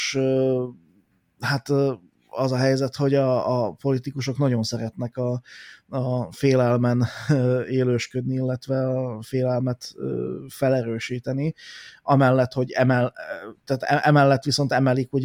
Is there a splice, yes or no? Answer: no